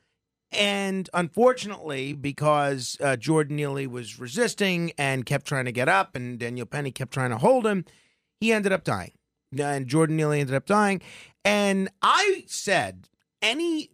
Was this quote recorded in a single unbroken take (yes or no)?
yes